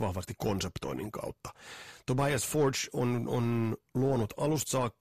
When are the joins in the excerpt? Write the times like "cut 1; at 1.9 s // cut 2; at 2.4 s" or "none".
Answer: none